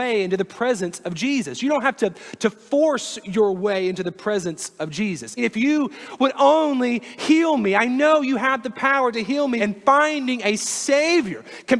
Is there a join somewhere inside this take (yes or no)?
yes